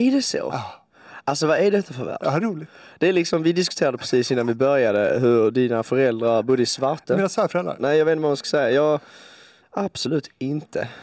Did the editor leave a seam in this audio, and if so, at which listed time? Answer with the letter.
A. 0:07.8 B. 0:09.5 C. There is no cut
A